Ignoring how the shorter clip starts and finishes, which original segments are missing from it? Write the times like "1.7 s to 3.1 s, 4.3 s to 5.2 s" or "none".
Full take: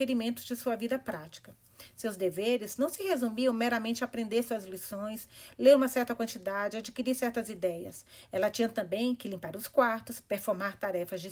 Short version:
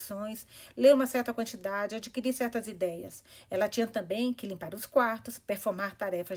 none